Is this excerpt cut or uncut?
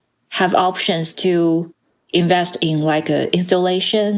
uncut